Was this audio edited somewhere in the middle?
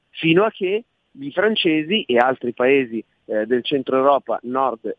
no; 0 cuts

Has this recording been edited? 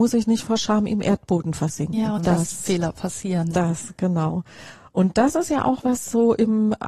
yes; 2 cuts; at 2.2 s, 5.8 s

